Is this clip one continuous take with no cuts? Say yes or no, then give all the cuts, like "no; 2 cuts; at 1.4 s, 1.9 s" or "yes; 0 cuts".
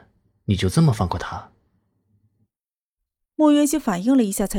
yes; 0 cuts